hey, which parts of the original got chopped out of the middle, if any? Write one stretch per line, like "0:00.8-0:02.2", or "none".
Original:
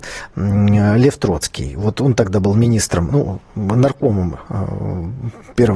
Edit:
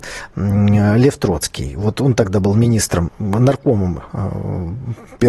0:03.1-0:03.4